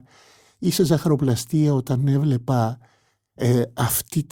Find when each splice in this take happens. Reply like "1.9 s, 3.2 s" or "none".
none